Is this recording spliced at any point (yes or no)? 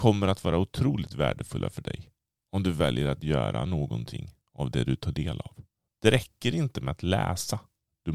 yes